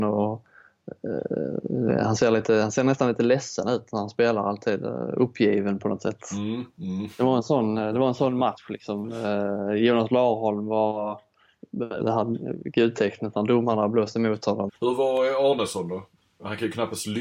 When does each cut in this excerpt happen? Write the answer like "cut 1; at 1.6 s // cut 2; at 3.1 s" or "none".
cut 1; at 12.0 s // cut 2; at 14.7 s